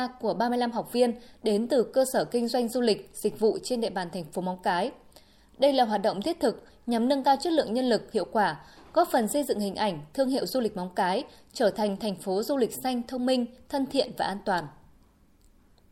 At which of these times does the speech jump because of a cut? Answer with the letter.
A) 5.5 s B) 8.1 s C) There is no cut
B